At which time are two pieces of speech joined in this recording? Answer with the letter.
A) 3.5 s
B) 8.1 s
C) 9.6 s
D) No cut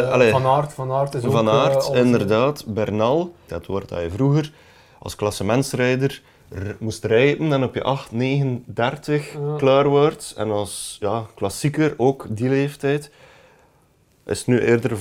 A